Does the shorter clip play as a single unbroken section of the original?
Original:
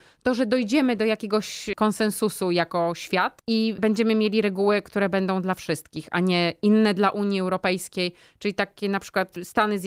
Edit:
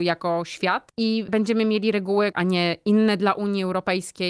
no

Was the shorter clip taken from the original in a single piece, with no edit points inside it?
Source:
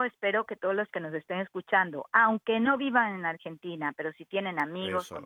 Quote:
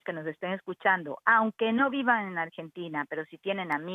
yes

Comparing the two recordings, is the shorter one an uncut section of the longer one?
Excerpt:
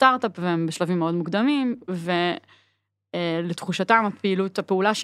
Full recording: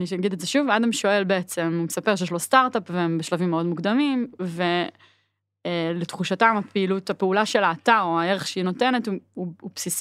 yes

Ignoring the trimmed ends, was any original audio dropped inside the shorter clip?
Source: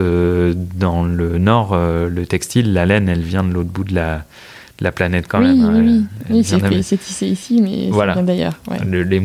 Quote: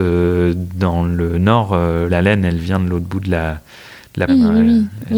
yes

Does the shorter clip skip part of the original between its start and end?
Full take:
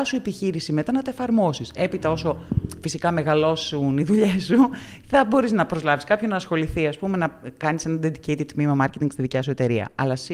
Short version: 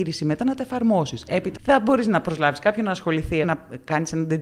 yes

